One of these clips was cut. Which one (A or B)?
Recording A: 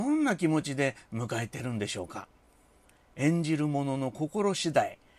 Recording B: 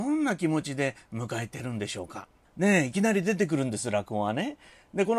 B